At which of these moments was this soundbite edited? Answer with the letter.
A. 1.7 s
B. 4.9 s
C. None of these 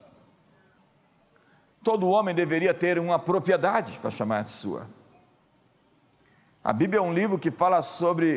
A